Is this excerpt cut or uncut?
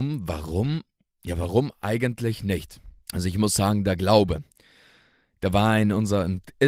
cut